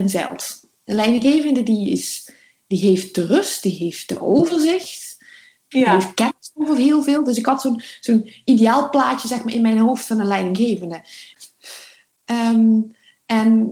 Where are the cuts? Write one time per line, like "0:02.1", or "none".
0:05.7
0:11.3